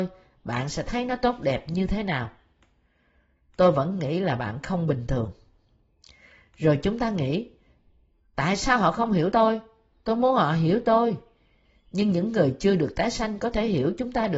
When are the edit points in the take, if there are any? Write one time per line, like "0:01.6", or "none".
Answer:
none